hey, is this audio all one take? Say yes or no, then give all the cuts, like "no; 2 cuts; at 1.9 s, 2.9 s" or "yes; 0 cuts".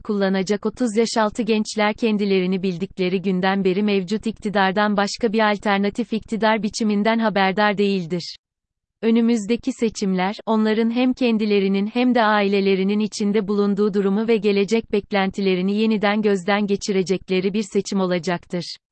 yes; 0 cuts